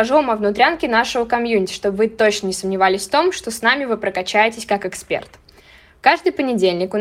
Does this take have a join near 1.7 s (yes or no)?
no